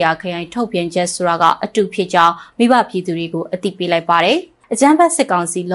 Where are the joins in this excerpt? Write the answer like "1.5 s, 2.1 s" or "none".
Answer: 4.6 s